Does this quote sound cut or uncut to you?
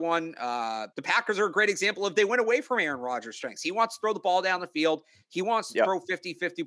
cut